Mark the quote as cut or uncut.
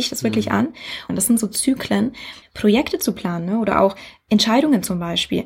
cut